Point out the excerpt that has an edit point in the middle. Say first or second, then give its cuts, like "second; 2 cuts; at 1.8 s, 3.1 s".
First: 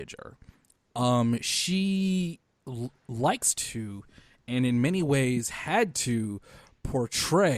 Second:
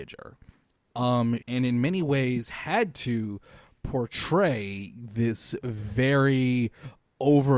second; 1 cut; at 1.4 s